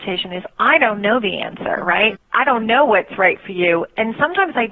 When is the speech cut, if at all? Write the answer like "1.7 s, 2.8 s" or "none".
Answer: 2.2 s